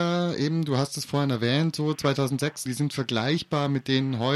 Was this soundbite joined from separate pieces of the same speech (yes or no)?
yes